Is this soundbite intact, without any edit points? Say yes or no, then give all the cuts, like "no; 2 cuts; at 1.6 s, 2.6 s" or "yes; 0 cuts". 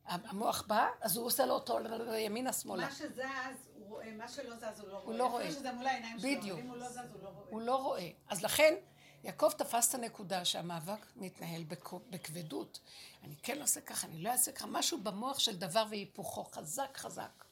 yes; 0 cuts